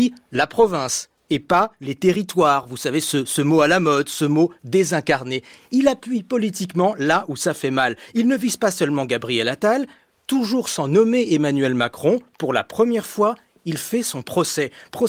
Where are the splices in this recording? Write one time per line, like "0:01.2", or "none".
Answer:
none